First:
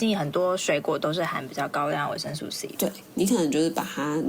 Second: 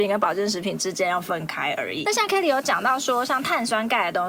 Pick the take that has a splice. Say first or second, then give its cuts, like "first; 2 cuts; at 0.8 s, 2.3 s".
second; 1 cut; at 2.3 s